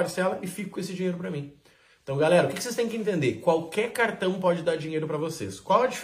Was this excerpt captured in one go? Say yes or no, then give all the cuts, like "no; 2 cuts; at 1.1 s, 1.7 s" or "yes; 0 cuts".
yes; 0 cuts